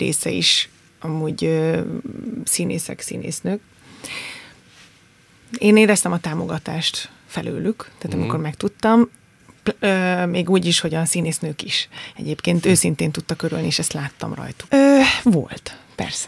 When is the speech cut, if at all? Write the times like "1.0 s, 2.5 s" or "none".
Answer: 14.7 s